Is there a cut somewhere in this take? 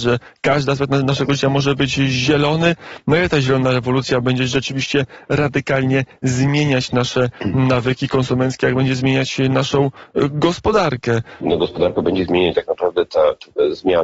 yes; 2 cuts; at 11.4 s, 12.5 s

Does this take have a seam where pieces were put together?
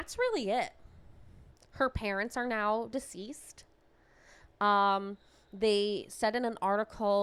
no; 0 cuts

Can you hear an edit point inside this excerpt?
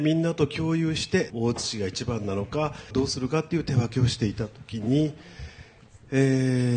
yes; 2 cuts; at 1.3 s, 2.9 s

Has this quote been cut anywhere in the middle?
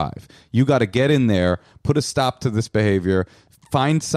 no; 0 cuts

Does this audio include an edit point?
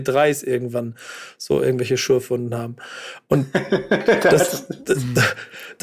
no; 0 cuts

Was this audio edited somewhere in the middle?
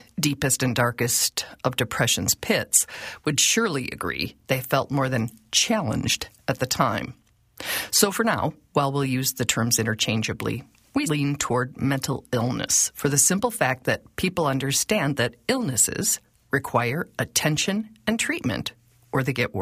yes; 1 cut; at 11.1 s

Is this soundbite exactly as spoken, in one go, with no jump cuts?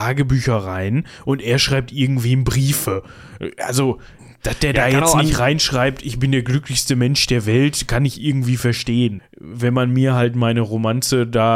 no; 1 cut; at 9.2 s

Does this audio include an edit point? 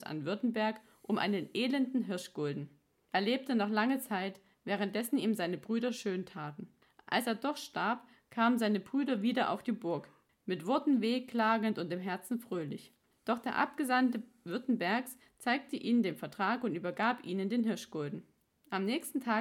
no; 0 cuts

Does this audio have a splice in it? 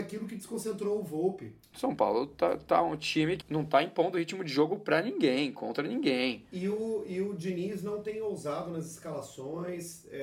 yes; 2 cuts; at 1.7 s, 3.4 s

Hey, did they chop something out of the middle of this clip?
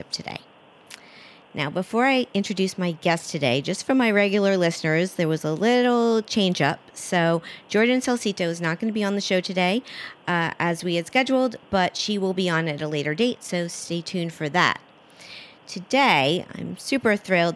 no; 0 cuts

